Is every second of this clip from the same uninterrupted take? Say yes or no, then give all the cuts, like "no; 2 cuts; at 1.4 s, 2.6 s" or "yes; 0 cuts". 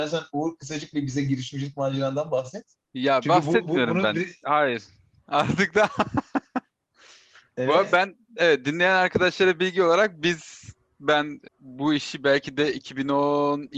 no; 1 cut; at 11.5 s